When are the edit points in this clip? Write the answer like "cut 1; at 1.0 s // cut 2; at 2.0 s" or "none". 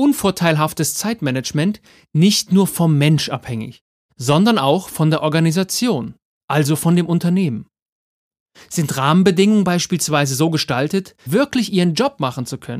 cut 1; at 11.3 s